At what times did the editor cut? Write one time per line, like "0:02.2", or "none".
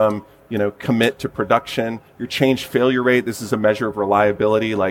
none

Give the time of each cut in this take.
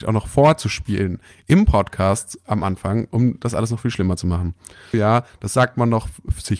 0:04.9

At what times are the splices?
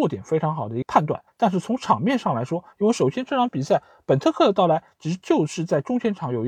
0:01.3
0:02.7

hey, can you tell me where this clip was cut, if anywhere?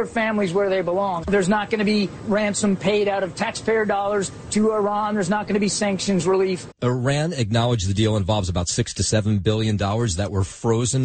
0:01.2
0:06.7

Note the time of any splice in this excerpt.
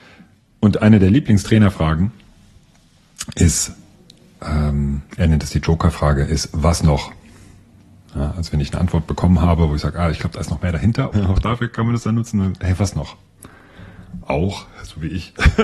0:11.1
0:14.2

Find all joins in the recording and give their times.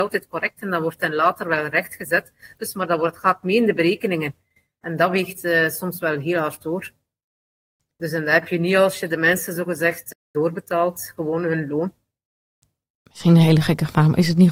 none

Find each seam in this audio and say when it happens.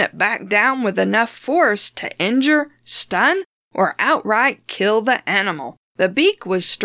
0:05.9

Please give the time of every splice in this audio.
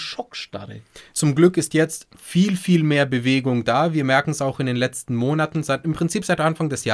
0:01.1

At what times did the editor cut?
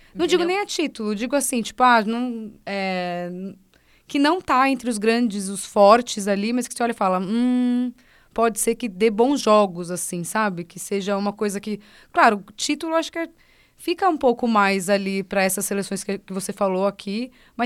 none

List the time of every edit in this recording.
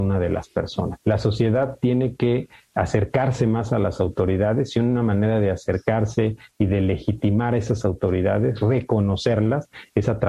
0:01.0

